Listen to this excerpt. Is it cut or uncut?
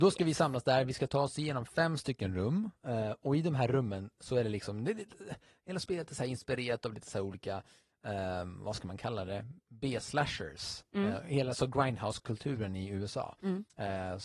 uncut